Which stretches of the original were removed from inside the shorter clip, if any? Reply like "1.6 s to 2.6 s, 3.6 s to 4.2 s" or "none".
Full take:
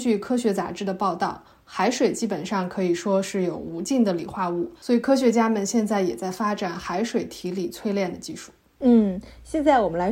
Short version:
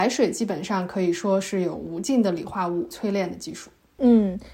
4.7 s to 7.7 s